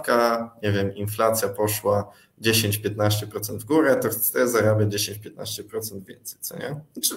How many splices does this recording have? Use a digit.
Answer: 0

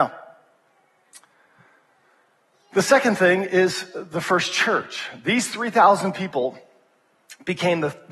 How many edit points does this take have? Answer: 0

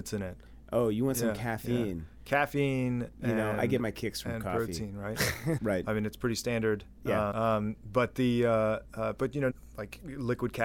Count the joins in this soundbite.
3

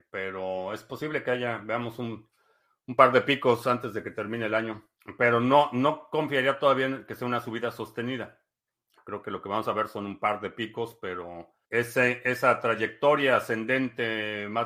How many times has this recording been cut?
1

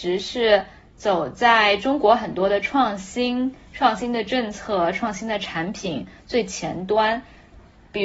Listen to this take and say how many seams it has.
0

